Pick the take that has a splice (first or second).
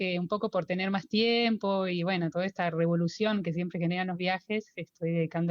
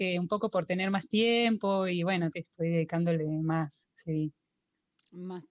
second